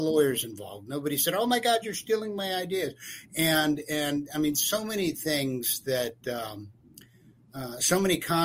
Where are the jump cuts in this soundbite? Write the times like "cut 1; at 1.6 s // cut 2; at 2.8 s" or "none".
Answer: none